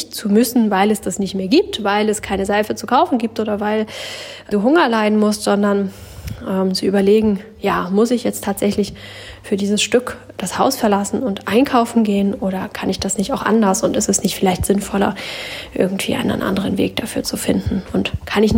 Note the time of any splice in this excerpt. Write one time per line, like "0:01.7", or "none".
0:04.5